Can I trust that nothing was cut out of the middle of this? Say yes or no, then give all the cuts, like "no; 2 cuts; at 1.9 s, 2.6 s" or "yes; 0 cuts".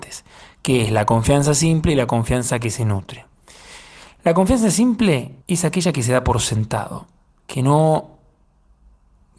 no; 1 cut; at 5.4 s